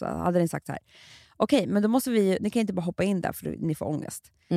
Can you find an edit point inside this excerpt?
no; 0 cuts

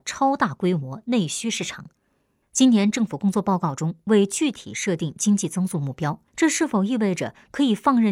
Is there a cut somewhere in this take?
yes; 2 cuts; at 2.4 s, 6.3 s

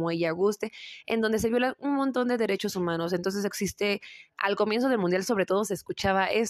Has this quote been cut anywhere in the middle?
no; 0 cuts

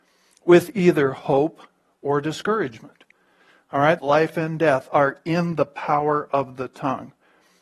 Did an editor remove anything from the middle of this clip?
yes; 1 cut; at 4.0 s

